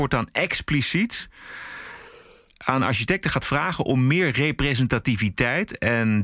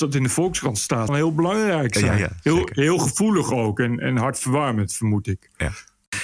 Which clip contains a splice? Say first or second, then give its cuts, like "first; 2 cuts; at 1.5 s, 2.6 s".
second; 1 cut; at 1.1 s